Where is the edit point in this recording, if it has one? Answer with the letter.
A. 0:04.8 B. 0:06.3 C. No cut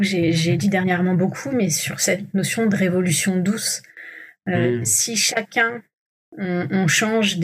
C